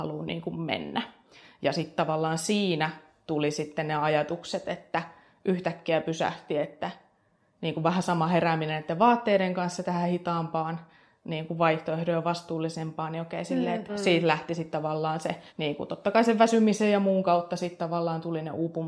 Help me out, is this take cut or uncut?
cut